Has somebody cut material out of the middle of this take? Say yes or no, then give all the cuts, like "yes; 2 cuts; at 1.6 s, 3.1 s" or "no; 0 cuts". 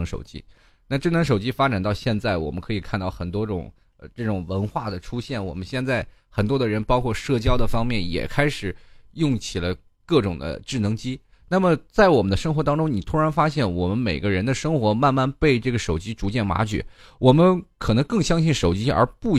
no; 0 cuts